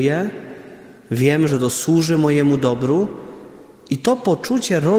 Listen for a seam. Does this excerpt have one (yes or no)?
yes